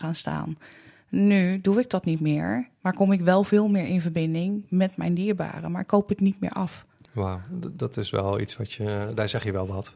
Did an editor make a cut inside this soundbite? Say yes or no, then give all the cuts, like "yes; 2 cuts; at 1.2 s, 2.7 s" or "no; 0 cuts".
no; 0 cuts